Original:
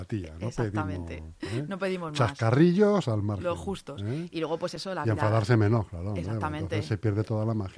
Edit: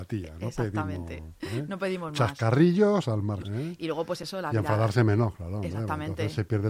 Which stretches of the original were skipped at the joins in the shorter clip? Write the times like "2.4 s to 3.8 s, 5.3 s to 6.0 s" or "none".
3.4 s to 4.0 s